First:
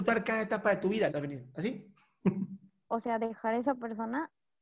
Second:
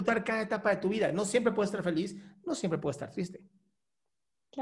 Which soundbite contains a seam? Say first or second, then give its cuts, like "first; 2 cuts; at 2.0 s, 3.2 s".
first; 2 cuts; at 1.1 s, 2.8 s